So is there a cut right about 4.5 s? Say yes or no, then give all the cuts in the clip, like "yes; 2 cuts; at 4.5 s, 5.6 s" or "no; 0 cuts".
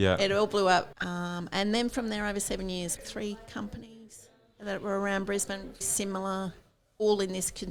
no; 3 cuts; at 0.9 s, 3.0 s, 5.8 s